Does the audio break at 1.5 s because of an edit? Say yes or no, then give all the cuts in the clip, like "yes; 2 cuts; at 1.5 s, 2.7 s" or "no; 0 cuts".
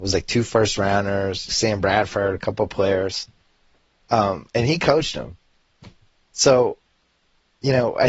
yes; 1 cut; at 1.5 s